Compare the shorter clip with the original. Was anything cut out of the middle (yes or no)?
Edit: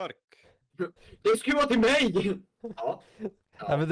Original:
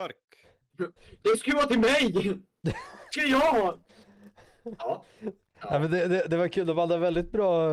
yes